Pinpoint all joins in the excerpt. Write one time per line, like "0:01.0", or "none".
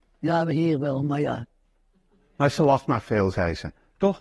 none